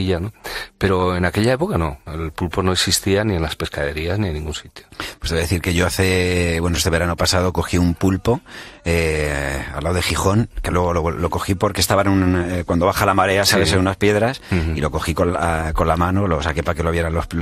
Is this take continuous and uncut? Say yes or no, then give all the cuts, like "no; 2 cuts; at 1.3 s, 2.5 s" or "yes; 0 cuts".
yes; 0 cuts